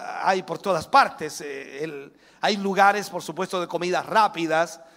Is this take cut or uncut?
uncut